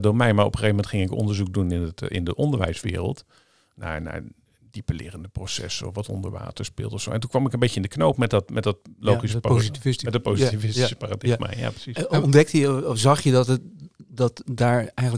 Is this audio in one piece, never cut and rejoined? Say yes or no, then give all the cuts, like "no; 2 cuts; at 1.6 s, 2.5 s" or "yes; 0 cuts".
yes; 0 cuts